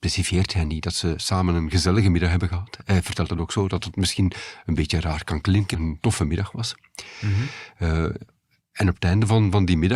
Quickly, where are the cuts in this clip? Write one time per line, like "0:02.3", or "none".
0:05.7